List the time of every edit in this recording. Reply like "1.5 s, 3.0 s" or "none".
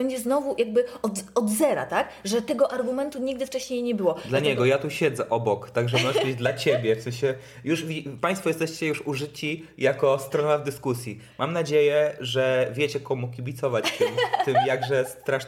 none